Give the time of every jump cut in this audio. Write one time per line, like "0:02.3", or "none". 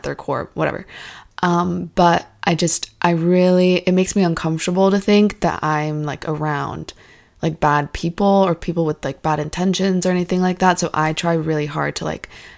none